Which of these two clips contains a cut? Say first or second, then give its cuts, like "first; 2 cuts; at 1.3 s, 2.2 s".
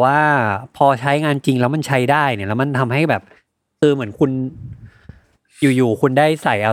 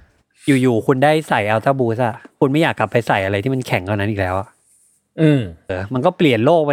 second; 1 cut; at 5.7 s